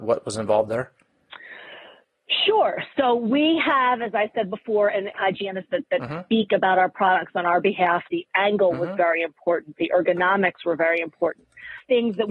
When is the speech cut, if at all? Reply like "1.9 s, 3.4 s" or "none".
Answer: 5.1 s, 8.1 s